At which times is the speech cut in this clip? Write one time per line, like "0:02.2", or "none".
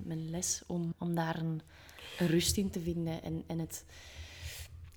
0:00.9